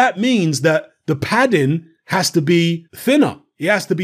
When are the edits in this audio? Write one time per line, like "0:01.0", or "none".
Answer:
0:02.9